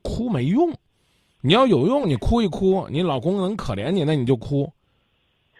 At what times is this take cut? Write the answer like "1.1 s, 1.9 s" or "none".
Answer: none

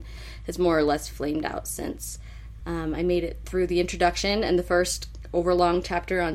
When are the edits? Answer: 2.6 s

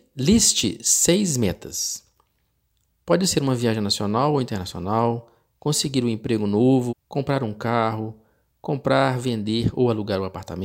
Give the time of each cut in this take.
6.9 s

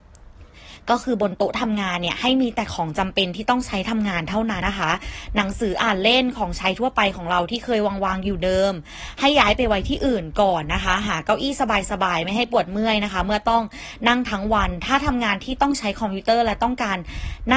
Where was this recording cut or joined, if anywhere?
4.6 s

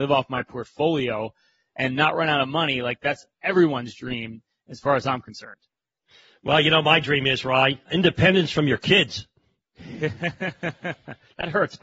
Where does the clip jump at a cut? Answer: none

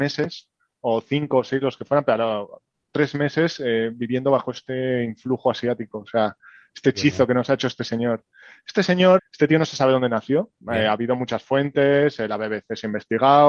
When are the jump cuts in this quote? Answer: 9.2 s, 10.6 s

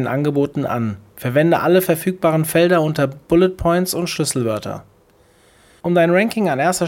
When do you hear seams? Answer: 5.8 s

